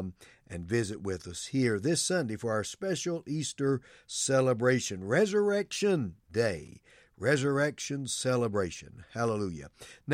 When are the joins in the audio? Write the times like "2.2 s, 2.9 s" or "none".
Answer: none